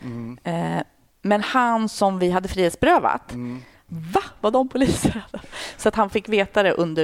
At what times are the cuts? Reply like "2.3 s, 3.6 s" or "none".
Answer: 3.9 s